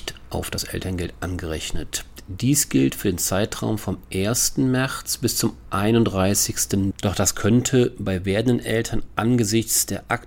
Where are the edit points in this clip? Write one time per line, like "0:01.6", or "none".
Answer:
0:06.9